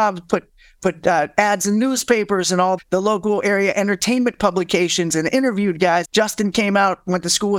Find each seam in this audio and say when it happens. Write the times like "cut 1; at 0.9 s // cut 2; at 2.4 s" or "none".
cut 1; at 2.8 s // cut 2; at 6.0 s

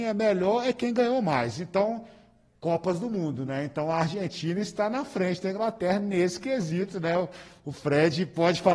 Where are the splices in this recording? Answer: none

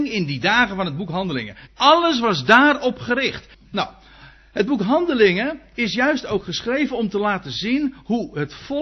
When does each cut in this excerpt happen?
cut 1; at 1.7 s // cut 2; at 3.5 s

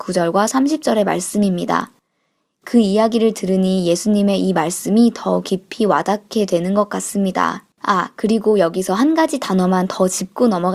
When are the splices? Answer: cut 1; at 7.7 s

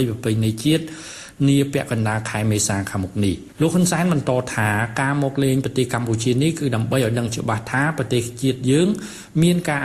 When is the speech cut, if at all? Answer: cut 1; at 3.5 s

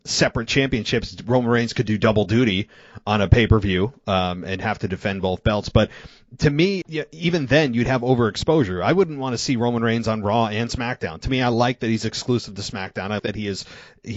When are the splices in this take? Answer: cut 1; at 6.8 s // cut 2; at 13.2 s

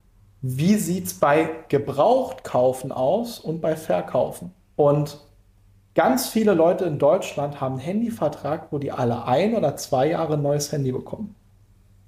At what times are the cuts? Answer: cut 1; at 4.6 s

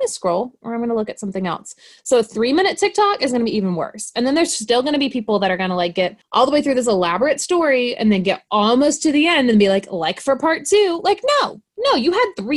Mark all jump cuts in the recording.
none

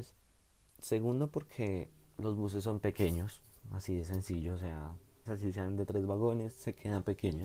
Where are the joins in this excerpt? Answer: cut 1; at 5.3 s

